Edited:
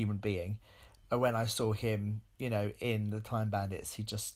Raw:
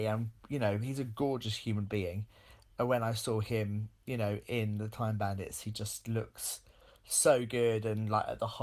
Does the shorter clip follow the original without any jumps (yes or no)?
yes